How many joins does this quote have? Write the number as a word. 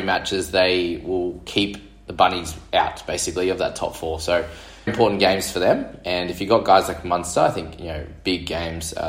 one